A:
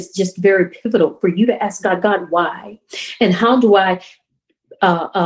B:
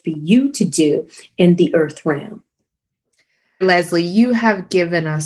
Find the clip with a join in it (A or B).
B